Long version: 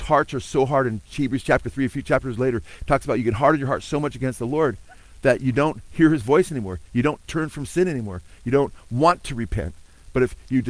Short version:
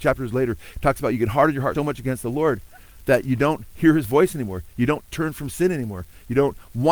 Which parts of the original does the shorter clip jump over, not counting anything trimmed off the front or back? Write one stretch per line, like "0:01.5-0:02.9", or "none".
0:03.8-0:03.9